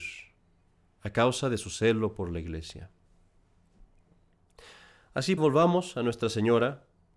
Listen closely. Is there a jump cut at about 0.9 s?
no; 1 cut; at 5.4 s

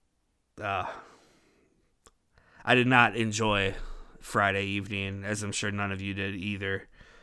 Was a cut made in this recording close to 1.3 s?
no; 0 cuts

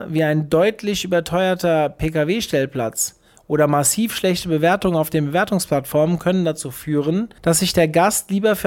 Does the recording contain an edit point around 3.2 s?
no; 1 cut; at 7.4 s

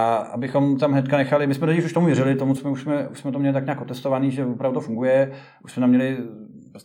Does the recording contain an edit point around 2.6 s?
yes; 1 cut; at 2.6 s

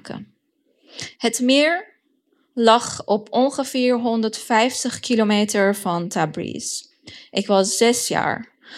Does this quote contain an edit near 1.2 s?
yes; 1 cut; at 1.2 s

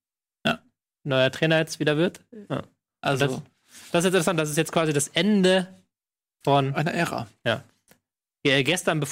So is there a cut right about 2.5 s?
yes; 1 cut; at 2.5 s

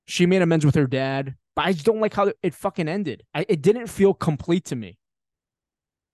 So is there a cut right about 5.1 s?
no; 2 cuts; at 1.5 s, 3.3 s

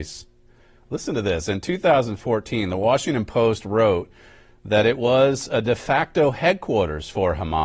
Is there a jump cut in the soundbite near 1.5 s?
no; 0 cuts

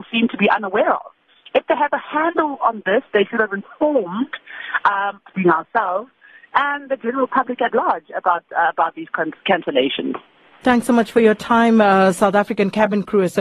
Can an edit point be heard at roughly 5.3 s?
yes; 2 cuts; at 5.3 s, 10.6 s

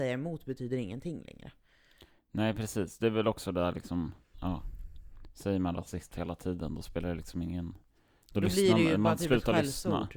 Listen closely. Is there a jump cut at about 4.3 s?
yes; 1 cut; at 4.3 s

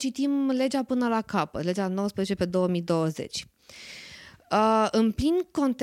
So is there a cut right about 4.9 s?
no; 1 cut; at 3.6 s

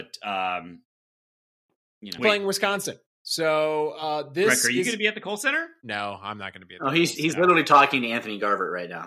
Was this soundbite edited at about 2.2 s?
yes; 1 cut; at 2.2 s

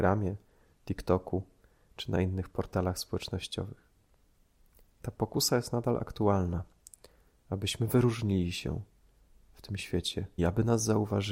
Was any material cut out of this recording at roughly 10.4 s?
yes; 1 cut; at 10.4 s

